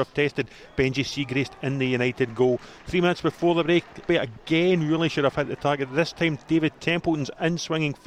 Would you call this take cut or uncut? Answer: cut